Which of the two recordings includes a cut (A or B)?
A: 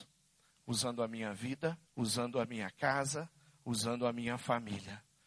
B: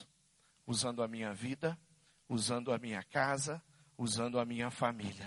A